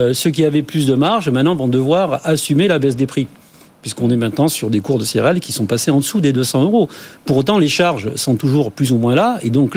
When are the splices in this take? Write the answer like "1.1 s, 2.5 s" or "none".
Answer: none